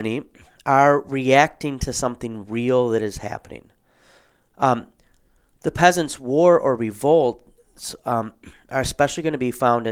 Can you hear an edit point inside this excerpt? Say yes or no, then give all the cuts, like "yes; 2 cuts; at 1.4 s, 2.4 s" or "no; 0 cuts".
no; 0 cuts